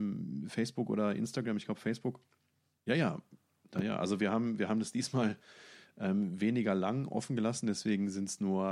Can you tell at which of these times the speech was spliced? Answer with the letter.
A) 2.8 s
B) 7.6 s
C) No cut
A